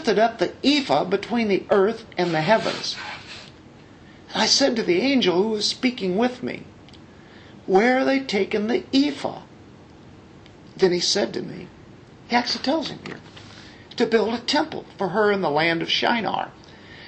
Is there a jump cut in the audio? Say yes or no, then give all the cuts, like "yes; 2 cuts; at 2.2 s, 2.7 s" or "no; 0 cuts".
no; 0 cuts